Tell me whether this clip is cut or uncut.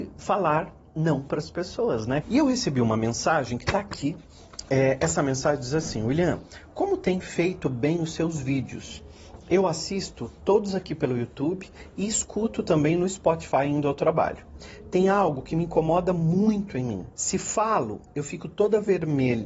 cut